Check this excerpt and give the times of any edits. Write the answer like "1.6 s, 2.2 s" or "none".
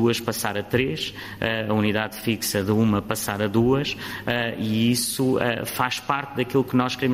none